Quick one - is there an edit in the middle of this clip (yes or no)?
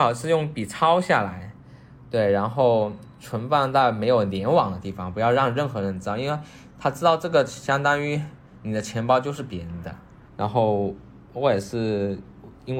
yes